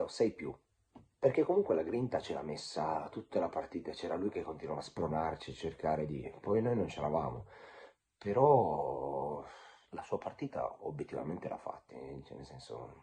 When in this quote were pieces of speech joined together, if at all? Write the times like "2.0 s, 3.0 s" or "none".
9.8 s, 11.9 s